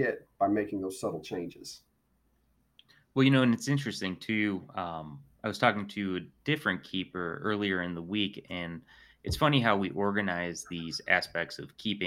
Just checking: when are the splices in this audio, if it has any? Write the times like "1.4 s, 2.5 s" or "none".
none